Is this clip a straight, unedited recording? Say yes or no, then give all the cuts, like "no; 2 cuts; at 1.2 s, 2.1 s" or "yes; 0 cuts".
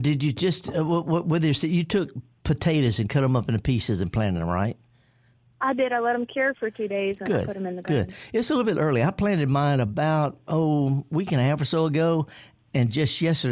yes; 0 cuts